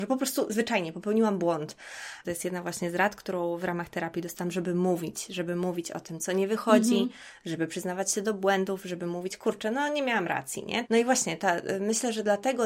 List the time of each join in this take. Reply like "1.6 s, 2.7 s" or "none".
2.2 s, 10.9 s

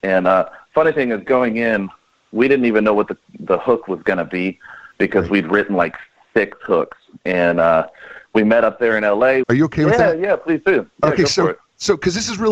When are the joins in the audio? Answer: 9.4 s

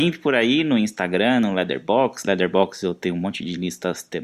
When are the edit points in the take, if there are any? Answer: none

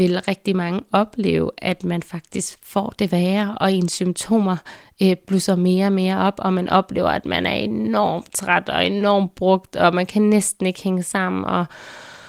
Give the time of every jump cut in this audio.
none

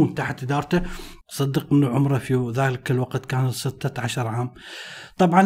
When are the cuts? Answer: 1.2 s

